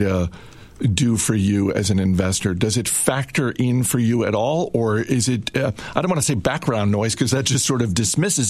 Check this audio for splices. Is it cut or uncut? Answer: uncut